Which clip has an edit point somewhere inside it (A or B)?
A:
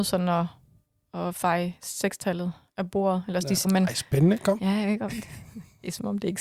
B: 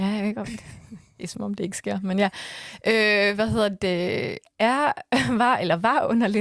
A